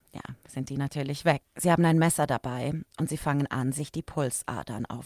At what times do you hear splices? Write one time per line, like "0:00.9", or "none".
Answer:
0:01.4